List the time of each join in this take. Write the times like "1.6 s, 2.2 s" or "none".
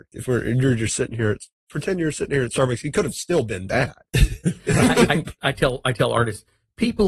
5.1 s